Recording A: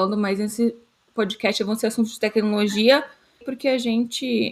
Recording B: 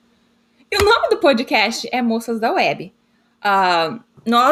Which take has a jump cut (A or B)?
A